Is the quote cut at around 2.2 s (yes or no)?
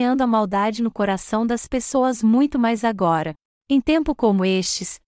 no